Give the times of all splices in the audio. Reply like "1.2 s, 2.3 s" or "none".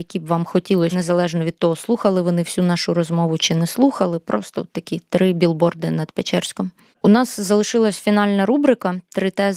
0.9 s, 7.0 s